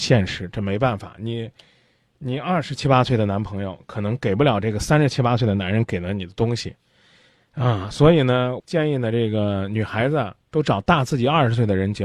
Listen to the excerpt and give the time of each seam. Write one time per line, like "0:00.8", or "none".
0:08.6
0:10.4